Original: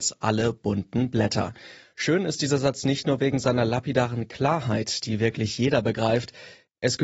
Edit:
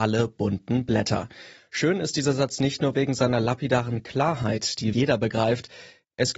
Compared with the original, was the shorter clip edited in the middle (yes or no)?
yes